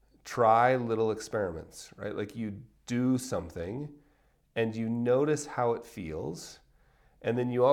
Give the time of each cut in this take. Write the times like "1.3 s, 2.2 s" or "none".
none